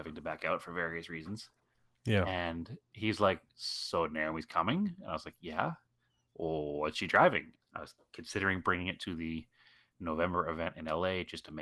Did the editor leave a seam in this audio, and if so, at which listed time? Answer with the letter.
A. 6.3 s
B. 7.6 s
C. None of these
B